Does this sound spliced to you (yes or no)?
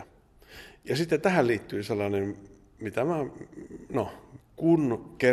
yes